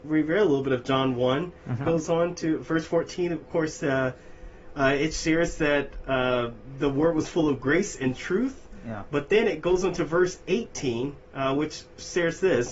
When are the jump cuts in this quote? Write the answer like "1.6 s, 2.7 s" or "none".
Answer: 1.8 s